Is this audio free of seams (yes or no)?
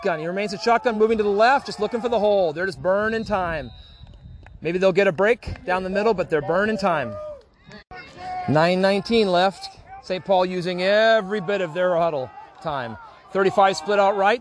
yes